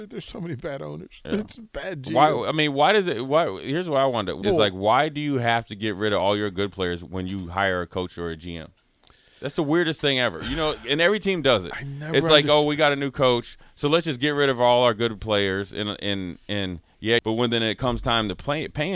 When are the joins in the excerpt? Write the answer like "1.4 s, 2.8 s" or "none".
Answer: 4.4 s, 17.2 s